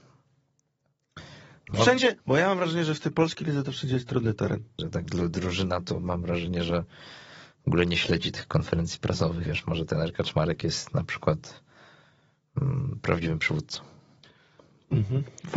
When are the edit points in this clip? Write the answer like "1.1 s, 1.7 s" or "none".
1.7 s, 4.8 s, 9.5 s